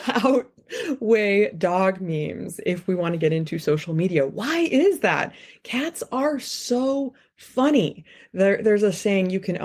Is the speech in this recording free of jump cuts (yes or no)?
yes